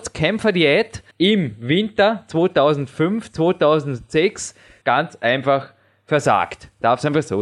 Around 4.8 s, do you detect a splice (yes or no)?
yes